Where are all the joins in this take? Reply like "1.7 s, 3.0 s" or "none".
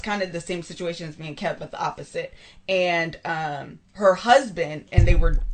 3.8 s